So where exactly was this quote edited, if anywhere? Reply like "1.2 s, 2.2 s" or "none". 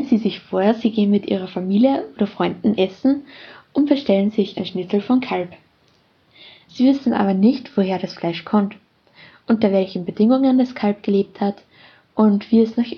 none